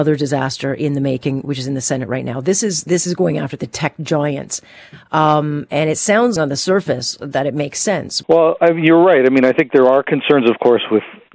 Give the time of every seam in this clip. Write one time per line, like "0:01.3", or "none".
0:06.4
0:08.2